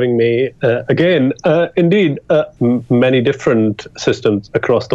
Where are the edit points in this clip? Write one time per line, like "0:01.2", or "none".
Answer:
0:02.6